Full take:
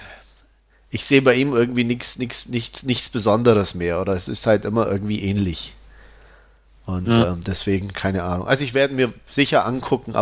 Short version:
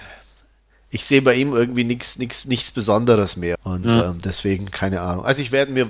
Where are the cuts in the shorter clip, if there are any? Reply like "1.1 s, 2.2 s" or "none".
2.4 s, 3.5 s